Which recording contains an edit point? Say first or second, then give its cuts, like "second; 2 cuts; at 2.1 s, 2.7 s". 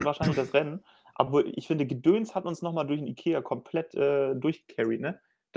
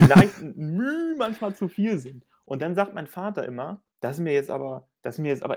second; 1 cut; at 3.9 s